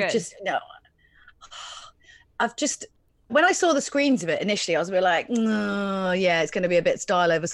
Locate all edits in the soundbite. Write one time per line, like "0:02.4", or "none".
0:03.3